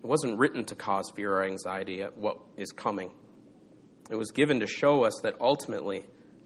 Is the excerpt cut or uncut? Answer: uncut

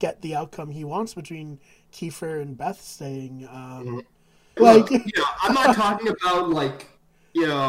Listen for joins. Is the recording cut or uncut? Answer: cut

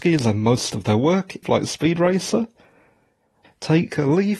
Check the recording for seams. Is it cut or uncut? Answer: cut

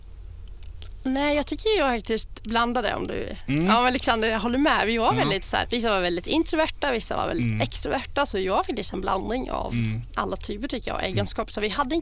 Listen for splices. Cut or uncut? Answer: cut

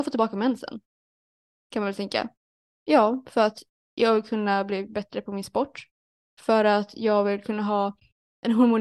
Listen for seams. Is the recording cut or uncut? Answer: uncut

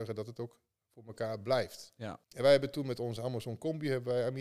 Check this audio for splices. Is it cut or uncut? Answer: cut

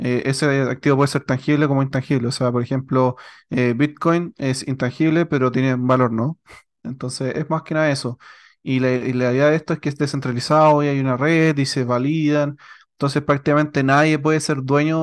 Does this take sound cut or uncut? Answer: uncut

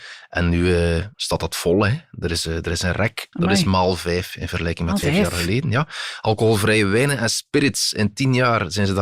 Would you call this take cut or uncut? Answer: cut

